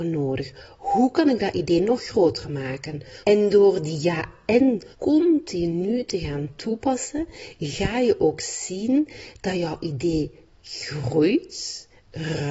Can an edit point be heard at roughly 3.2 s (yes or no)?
yes